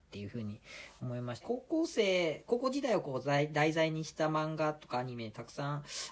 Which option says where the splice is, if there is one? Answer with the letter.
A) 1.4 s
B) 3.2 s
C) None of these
A